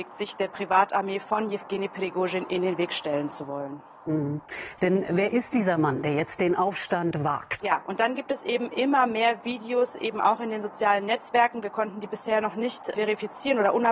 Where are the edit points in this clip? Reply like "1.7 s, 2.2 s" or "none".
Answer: 4.8 s, 7.6 s, 12.9 s